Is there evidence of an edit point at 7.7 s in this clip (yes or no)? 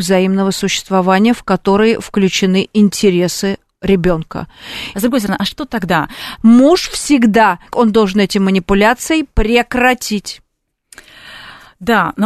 yes